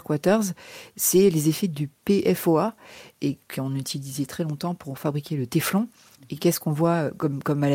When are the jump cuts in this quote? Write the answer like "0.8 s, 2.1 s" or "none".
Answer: none